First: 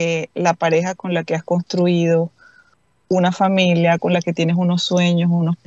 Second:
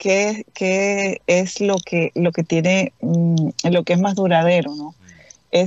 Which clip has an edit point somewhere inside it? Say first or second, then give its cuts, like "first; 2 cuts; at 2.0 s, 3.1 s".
first; 1 cut; at 4.0 s